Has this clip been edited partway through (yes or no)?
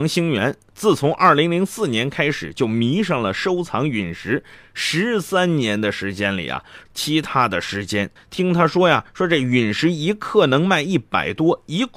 yes